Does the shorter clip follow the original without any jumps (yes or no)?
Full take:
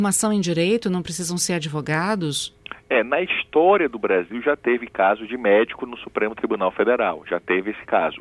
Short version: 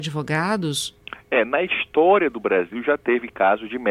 yes